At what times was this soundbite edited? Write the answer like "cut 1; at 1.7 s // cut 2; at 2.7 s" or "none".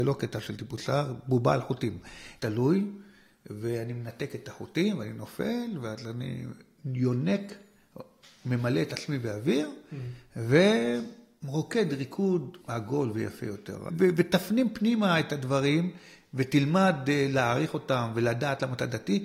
cut 1; at 2.4 s // cut 2; at 12.6 s // cut 3; at 13.9 s